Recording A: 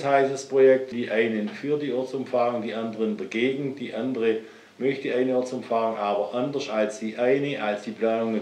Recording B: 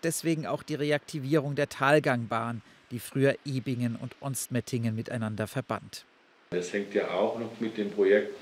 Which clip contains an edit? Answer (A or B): A